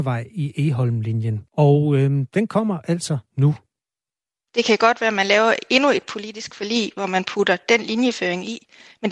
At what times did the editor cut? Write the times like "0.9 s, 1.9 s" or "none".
1.5 s, 4.5 s